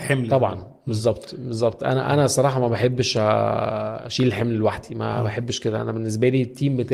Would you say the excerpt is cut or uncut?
uncut